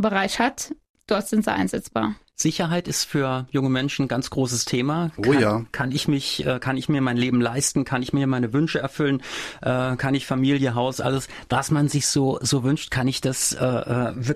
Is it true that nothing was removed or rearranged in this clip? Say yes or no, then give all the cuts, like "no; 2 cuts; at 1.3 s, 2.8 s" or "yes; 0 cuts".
yes; 0 cuts